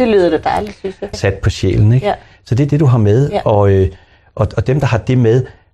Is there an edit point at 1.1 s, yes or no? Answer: yes